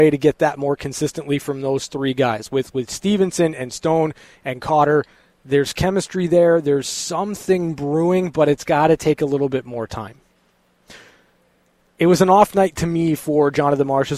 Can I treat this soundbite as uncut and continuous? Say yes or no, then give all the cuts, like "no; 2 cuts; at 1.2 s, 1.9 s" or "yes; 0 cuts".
yes; 0 cuts